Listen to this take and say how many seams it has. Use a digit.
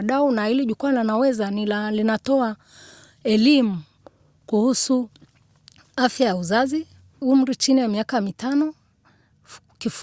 1